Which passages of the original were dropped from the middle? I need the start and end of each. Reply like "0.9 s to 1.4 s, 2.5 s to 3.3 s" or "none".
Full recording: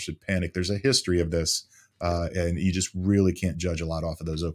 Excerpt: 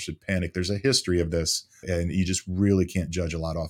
1.8 s to 2.3 s